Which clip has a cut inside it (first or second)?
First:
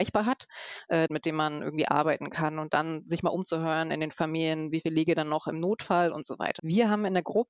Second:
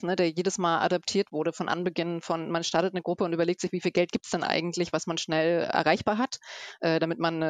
first